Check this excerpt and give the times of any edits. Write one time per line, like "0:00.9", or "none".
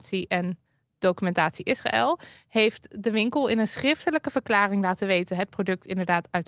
none